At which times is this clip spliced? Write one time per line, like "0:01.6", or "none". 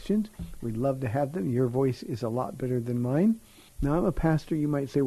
0:03.7

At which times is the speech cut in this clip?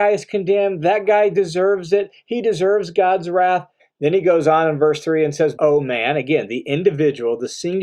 0:03.8
0:05.6

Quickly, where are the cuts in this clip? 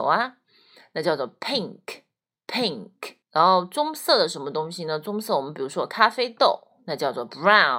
0:03.2

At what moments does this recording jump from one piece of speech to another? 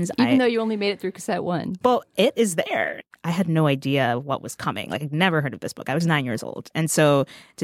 none

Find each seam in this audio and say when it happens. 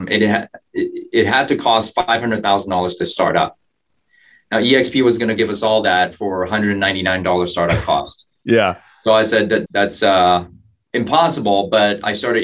0:09.7

